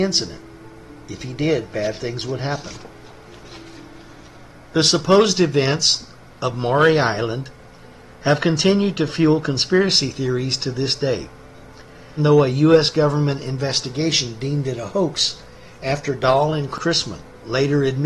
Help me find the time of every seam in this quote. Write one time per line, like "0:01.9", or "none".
0:12.2